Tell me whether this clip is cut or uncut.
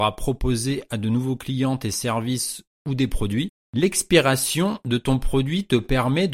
uncut